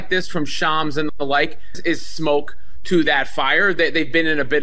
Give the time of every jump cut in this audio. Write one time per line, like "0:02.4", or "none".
0:01.7